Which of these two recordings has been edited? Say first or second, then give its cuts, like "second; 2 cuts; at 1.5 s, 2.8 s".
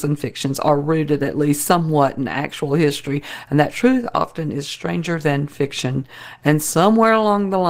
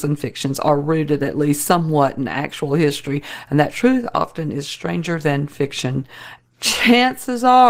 second; 1 cut; at 6.4 s